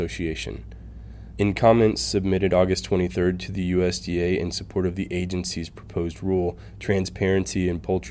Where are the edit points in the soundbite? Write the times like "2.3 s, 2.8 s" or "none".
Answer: 1.3 s